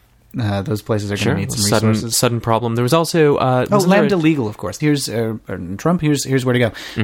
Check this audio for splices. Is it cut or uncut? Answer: cut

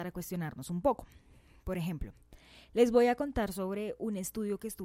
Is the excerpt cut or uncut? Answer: uncut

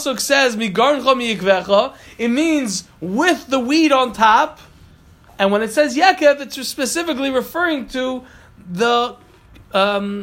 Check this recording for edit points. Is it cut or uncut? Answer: uncut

